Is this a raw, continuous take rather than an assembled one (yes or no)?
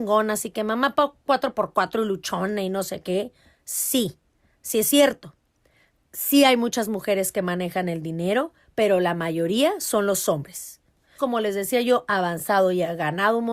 no